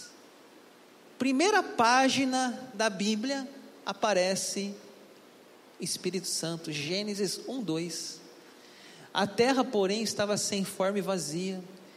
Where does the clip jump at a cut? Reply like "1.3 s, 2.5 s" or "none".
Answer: 1.0 s